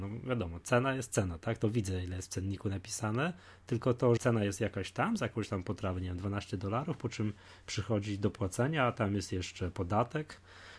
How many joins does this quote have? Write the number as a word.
one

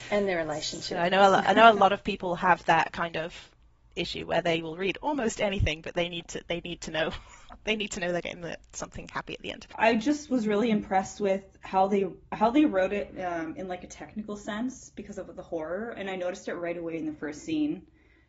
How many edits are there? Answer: one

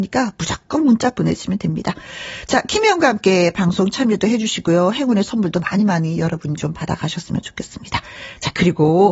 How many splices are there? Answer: zero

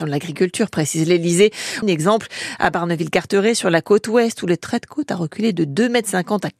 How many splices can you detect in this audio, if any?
one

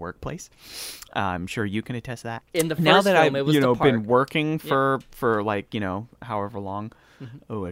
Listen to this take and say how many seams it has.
one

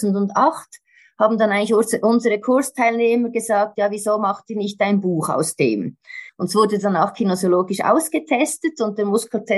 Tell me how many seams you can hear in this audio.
one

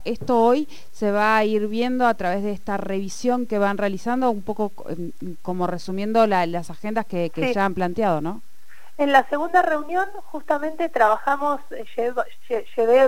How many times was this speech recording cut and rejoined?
zero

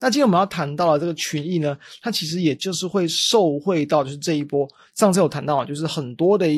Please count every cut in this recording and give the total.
zero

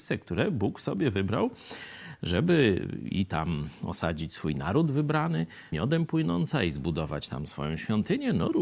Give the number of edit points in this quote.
one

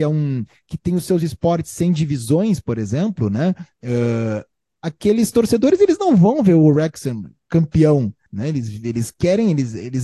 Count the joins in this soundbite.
two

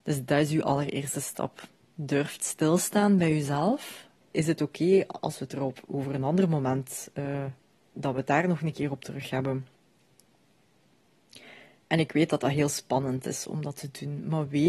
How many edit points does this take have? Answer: one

